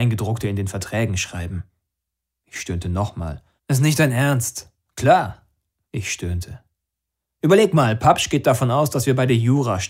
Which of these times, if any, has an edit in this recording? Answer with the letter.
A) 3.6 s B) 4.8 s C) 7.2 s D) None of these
A